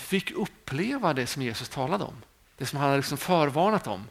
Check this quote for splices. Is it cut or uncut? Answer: uncut